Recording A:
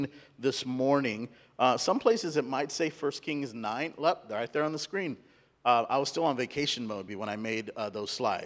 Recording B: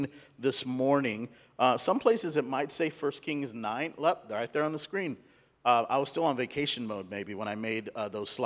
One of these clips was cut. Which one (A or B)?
A